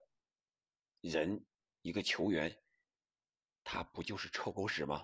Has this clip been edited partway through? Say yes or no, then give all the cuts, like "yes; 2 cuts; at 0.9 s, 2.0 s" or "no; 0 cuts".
no; 0 cuts